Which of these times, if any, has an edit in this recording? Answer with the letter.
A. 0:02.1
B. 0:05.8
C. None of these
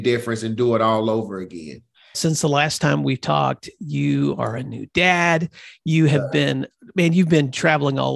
A